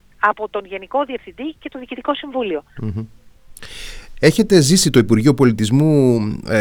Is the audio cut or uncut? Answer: cut